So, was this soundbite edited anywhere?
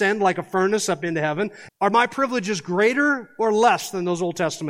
yes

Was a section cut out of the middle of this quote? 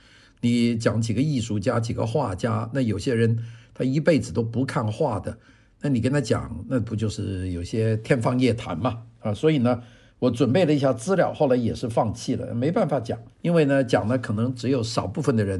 yes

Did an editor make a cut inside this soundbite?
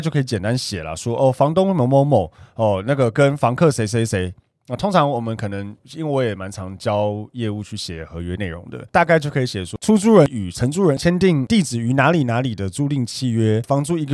yes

